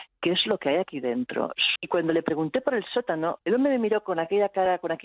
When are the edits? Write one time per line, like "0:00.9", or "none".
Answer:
0:01.8
0:03.4